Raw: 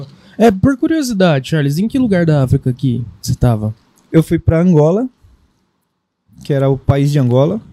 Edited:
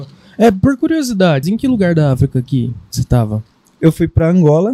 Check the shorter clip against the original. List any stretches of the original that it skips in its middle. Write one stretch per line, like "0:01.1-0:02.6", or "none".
0:01.4-0:01.7